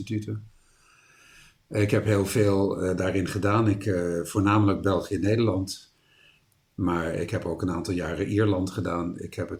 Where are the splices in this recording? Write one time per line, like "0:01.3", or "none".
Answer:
none